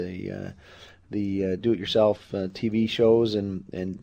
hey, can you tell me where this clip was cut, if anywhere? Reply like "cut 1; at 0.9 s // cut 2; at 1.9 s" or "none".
none